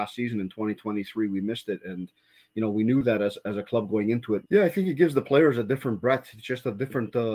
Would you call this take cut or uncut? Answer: cut